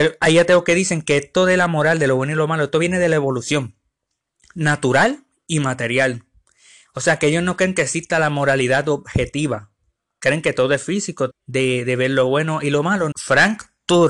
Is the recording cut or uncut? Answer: cut